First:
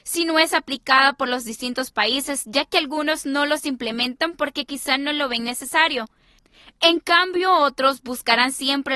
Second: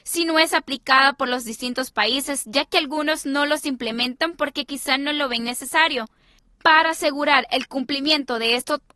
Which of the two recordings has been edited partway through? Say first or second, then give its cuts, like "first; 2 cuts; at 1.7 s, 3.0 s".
second; 1 cut; at 6.4 s